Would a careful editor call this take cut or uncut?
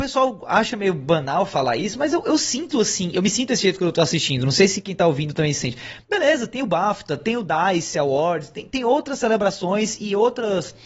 cut